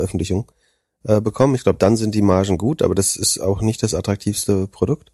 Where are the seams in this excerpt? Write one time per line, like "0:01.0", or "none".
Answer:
none